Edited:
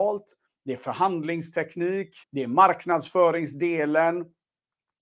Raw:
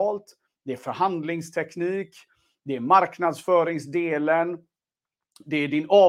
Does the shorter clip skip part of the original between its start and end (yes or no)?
yes